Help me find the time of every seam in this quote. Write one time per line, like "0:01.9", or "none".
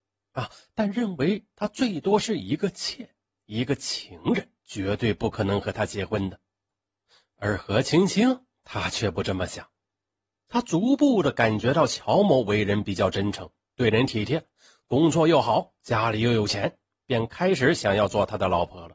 0:04.6